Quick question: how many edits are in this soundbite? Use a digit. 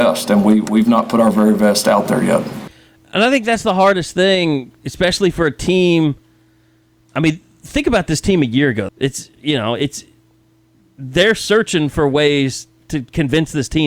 1